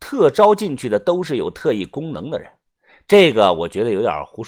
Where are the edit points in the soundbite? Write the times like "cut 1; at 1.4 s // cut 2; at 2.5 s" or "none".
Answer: none